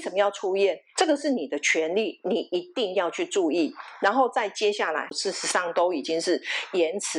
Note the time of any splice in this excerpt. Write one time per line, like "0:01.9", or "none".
0:01.0
0:05.1